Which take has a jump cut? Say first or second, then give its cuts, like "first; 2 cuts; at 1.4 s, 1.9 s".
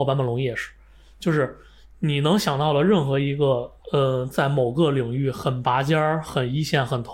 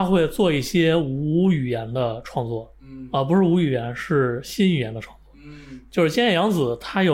first; 1 cut; at 3.8 s